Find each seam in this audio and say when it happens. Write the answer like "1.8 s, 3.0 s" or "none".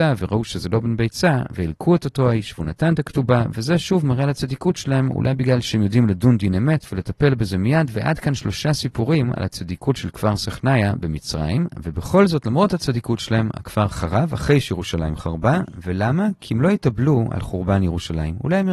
none